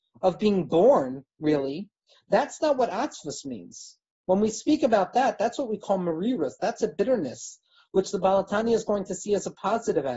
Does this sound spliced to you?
no; 0 cuts

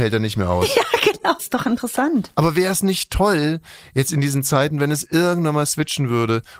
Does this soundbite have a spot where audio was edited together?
yes; 1 cut; at 1.4 s

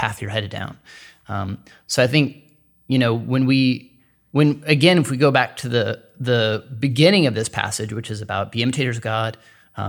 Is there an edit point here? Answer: no; 0 cuts

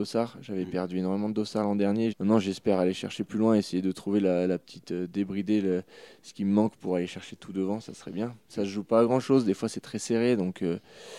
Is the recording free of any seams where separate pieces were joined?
no; 1 cut; at 2.1 s

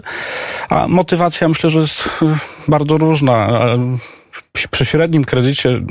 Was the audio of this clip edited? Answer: no; 0 cuts

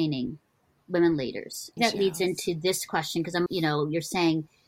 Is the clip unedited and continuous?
no; 2 cuts; at 1.8 s, 3.5 s

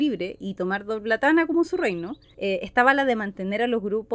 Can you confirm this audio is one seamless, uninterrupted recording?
yes; 0 cuts

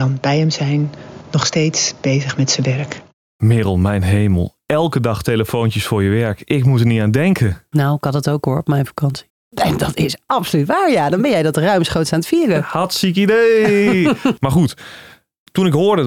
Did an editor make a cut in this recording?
yes; 1 cut; at 9.3 s

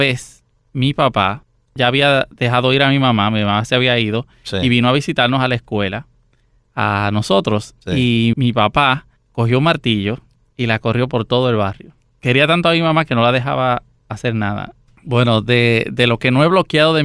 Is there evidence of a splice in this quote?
yes; 3 cuts; at 8.3 s, 12.2 s, 14.9 s

